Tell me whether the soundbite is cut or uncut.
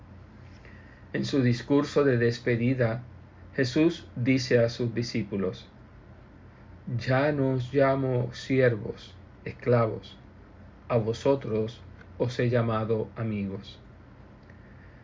uncut